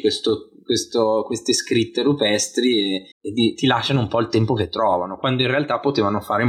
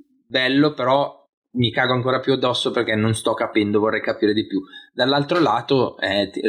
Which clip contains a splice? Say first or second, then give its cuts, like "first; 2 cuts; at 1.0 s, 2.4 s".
first; 1 cut; at 3.1 s